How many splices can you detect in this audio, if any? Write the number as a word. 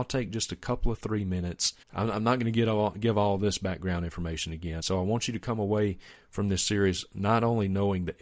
two